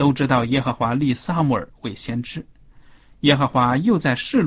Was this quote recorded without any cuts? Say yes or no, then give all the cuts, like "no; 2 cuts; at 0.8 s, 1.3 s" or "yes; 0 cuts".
yes; 0 cuts